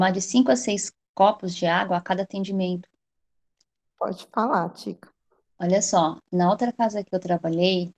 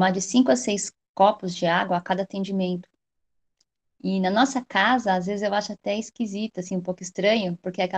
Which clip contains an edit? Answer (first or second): first